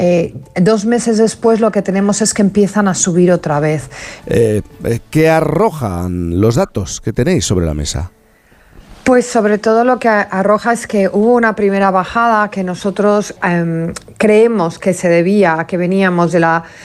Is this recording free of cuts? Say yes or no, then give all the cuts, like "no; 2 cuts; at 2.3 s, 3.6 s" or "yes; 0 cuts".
no; 2 cuts; at 4.2 s, 13.4 s